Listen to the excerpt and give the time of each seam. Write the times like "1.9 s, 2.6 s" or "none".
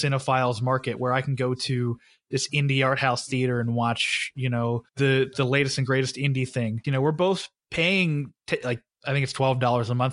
4.9 s, 6.8 s